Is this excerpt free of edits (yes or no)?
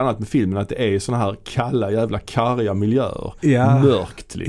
yes